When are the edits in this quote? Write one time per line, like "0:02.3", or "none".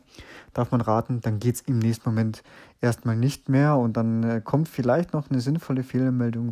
none